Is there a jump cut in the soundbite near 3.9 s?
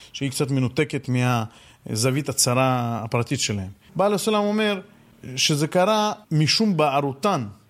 yes; 2 cuts; at 3.9 s, 6.2 s

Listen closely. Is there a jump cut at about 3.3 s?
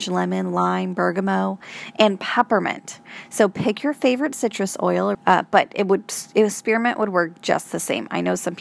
no; 1 cut; at 5.1 s

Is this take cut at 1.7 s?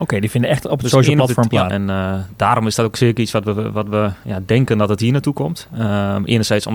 yes; 1 cut; at 1.7 s

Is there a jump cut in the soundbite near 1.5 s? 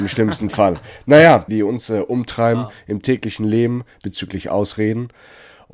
yes; 1 cut; at 1.5 s

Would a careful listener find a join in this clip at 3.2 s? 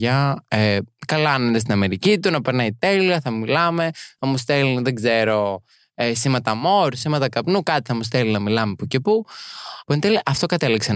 no; 1 cut; at 9.8 s

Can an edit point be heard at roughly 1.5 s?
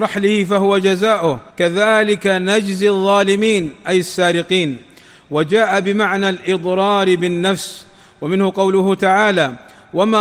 yes; 1 cut; at 1.5 s

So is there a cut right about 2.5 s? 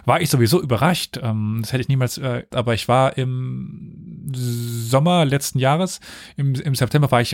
yes; 1 cut; at 2.5 s

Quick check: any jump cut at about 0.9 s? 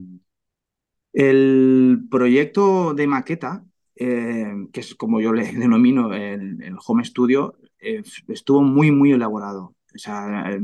yes; 1 cut; at 0.9 s

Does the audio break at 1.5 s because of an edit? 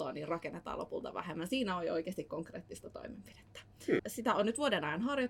no; 1 cut; at 4.0 s

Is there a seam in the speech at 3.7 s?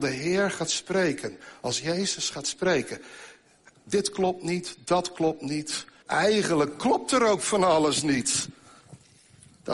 yes; 2 cuts; at 3.7 s, 6.0 s

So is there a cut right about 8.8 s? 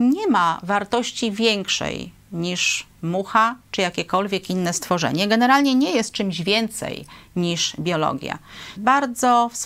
yes; 1 cut; at 8.8 s

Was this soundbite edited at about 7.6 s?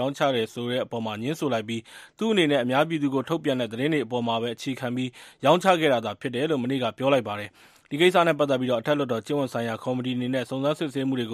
no; 0 cuts

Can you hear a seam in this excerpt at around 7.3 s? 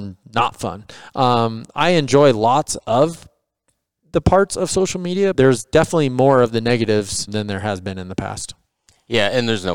yes; 2 cuts; at 5.3 s, 7.3 s

